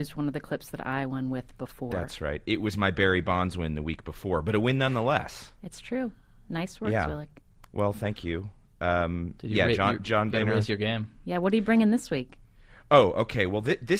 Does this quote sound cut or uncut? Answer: uncut